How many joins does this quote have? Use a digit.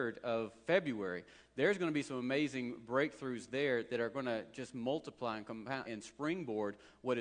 1